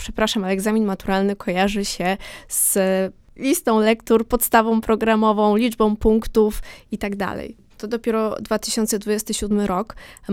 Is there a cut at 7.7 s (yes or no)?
yes